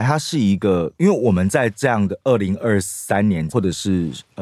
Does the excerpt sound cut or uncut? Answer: cut